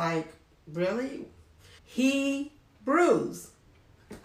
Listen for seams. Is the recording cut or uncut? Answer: cut